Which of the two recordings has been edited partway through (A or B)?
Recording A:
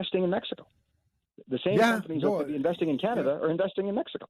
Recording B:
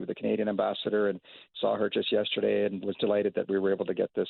B